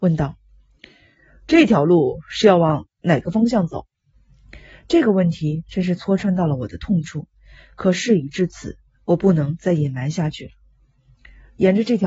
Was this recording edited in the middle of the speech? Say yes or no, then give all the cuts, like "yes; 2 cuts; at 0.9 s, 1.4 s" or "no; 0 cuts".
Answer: no; 0 cuts